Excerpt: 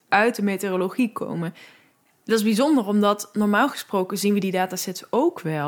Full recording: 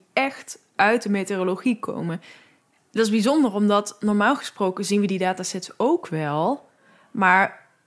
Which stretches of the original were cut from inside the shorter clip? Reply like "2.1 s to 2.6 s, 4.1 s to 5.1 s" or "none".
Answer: none